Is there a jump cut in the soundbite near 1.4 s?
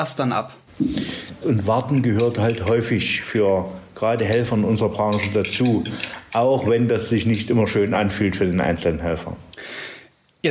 yes; 1 cut; at 1.4 s

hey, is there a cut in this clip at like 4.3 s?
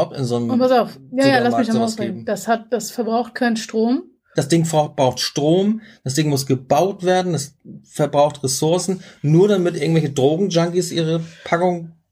yes; 1 cut; at 4.3 s

